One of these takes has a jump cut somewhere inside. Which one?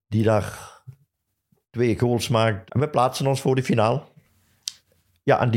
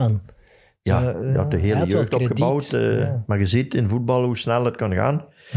first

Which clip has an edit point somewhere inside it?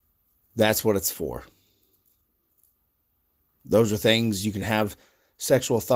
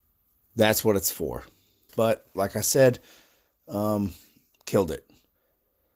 second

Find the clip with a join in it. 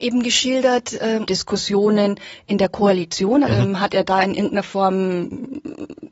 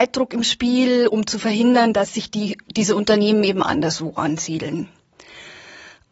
first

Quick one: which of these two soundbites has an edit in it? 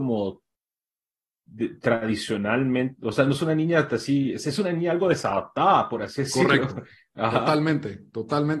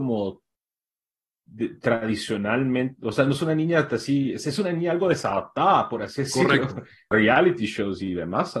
second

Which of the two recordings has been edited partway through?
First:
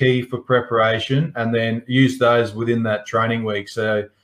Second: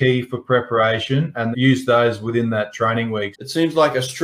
second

